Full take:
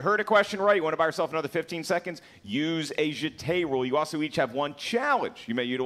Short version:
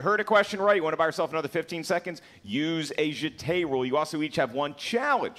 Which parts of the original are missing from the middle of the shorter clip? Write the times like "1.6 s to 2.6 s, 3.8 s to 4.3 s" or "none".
none